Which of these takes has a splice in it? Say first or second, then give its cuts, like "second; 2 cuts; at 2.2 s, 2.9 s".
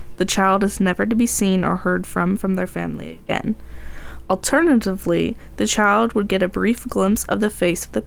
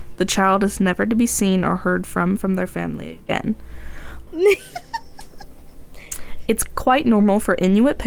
second; 1 cut; at 4.3 s